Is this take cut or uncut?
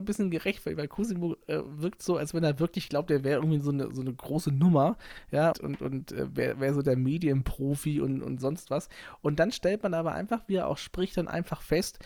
cut